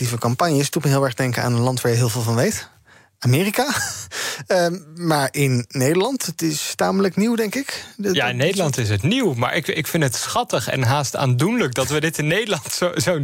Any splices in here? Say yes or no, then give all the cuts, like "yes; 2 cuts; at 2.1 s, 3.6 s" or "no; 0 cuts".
no; 0 cuts